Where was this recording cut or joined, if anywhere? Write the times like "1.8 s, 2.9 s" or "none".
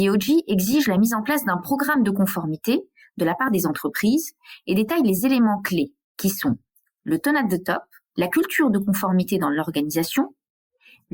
8.1 s

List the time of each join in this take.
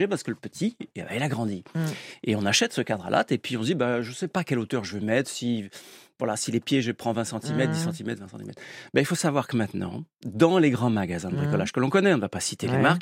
none

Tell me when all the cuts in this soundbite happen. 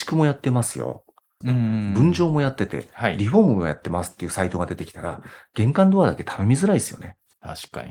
1.4 s

